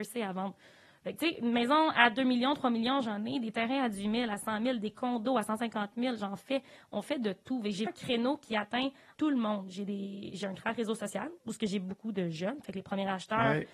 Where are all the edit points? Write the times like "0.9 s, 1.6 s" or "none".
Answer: 7.9 s, 9.2 s